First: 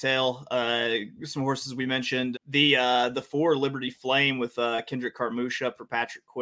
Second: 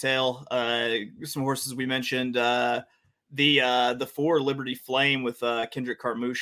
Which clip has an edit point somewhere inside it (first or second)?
first